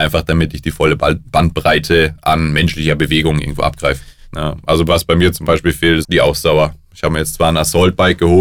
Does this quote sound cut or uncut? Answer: cut